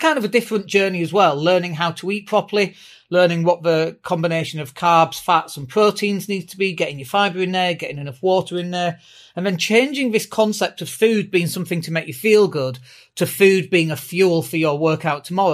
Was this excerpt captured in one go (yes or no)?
yes